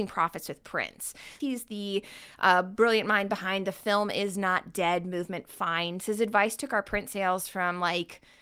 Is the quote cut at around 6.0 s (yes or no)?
yes